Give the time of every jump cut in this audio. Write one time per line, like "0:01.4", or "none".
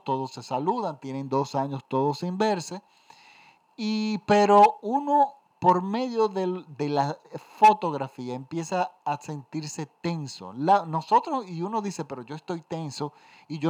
none